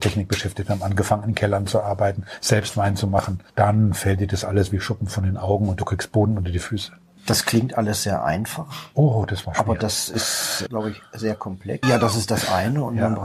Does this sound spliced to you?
yes; 2 cuts; at 10.7 s, 11.8 s

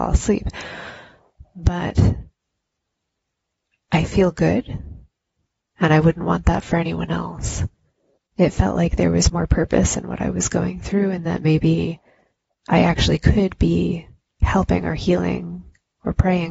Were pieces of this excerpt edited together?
yes; 2 cuts; at 5.7 s, 8.1 s

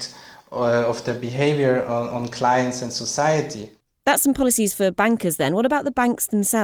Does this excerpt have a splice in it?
no; 0 cuts

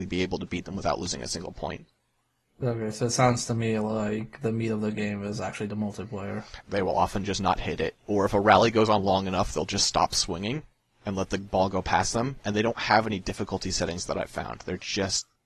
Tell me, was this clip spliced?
yes; 1 cut; at 6.6 s

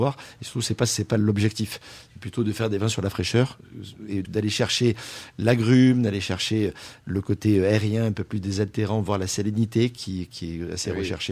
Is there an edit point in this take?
yes; 1 cut; at 4.2 s

